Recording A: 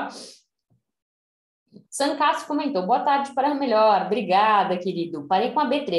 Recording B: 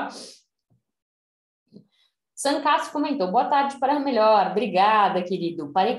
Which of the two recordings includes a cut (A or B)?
A